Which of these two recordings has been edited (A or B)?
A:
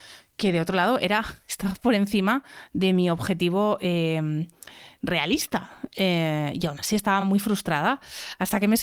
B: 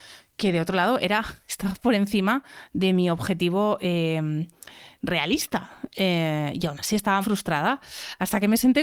B